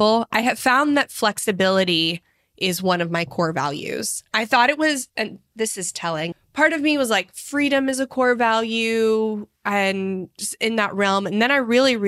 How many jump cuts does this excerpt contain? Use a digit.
2